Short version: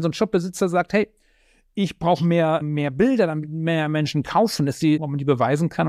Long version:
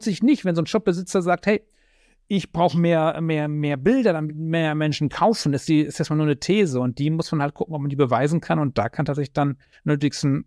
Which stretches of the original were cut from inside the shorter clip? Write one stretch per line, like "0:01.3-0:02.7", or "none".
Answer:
0:03.1-0:03.5
0:05.8-0:07.7